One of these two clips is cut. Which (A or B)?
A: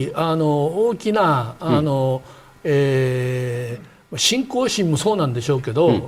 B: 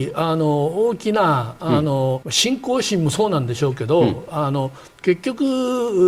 B